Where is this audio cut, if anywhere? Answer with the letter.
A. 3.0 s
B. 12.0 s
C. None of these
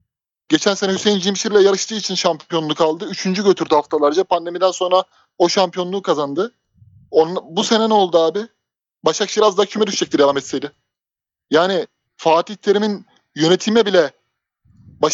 B